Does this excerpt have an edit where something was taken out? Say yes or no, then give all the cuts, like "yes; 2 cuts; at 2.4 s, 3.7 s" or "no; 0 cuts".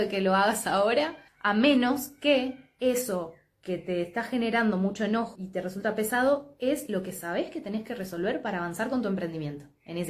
yes; 2 cuts; at 1.3 s, 5.3 s